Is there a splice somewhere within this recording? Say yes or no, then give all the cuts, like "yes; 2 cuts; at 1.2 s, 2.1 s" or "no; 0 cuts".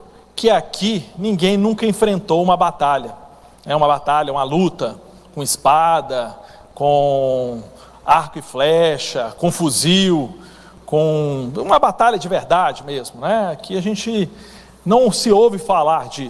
no; 0 cuts